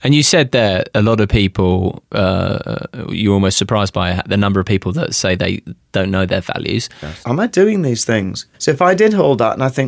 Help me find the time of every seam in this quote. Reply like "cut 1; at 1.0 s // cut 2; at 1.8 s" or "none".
cut 1; at 7.2 s // cut 2; at 8.5 s